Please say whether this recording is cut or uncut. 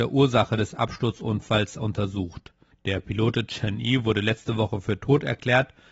uncut